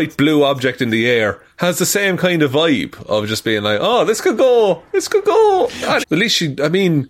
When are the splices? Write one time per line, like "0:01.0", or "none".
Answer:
0:06.0